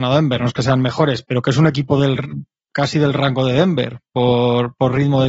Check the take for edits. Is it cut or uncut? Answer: cut